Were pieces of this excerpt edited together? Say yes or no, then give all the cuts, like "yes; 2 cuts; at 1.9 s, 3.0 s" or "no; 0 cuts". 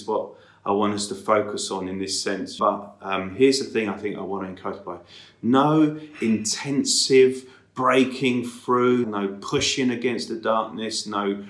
yes; 2 cuts; at 2.6 s, 9.0 s